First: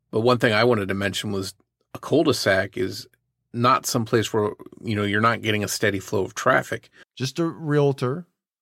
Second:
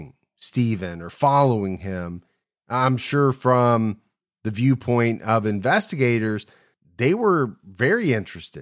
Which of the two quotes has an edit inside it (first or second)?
first